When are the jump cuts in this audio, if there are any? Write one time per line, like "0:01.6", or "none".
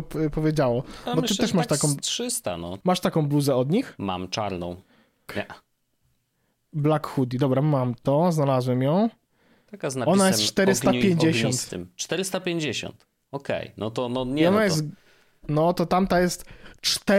0:02.8
0:05.3